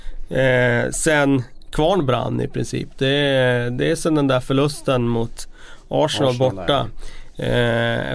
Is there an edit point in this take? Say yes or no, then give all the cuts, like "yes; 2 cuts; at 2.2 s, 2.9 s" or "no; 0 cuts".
no; 0 cuts